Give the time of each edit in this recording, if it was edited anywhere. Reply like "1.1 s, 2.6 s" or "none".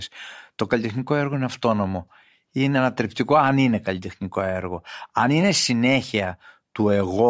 none